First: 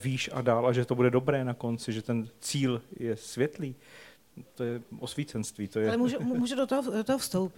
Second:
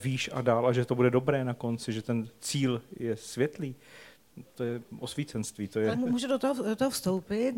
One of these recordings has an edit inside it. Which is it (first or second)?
second